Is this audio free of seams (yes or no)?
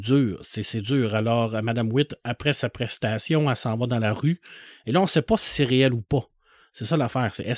yes